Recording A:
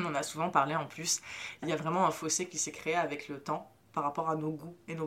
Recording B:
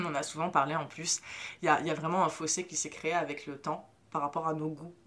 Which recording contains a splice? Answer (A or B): A